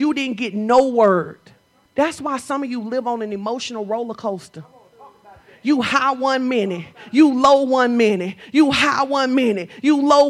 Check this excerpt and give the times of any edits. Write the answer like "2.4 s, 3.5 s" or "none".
1.8 s